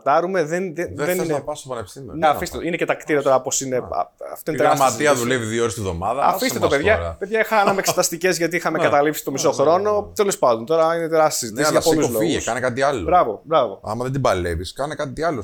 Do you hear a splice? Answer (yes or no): yes